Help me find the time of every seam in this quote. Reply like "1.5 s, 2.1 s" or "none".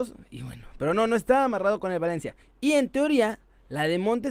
2.4 s

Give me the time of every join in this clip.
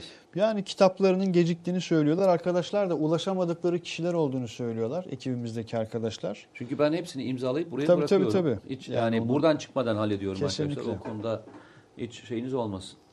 none

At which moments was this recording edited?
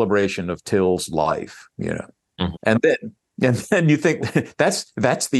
2.5 s, 4.2 s

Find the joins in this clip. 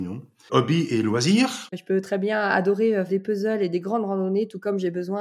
1.7 s, 3.1 s

